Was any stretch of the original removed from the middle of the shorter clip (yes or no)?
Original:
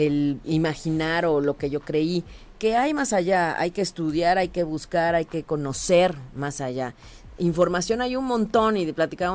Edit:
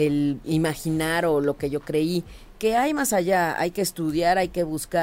no